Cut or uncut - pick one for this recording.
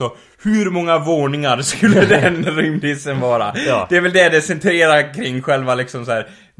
uncut